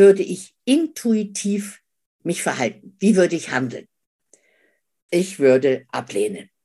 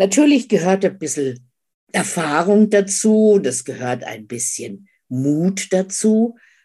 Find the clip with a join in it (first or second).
first